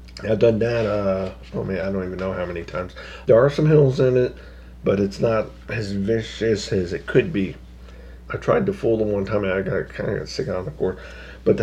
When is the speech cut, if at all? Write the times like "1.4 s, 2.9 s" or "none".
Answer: 3.2 s, 8.3 s